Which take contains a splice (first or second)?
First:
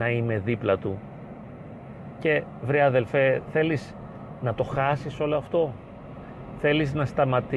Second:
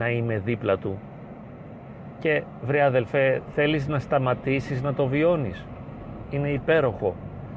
second